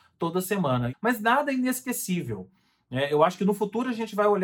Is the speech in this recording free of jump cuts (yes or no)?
no